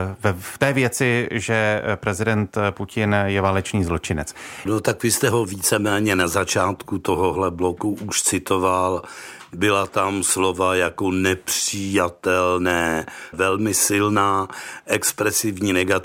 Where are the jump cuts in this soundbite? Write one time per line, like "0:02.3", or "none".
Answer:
0:04.7
0:13.3